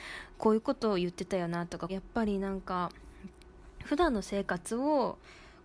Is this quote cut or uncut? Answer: cut